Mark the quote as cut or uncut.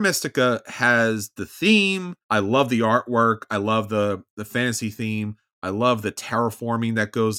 cut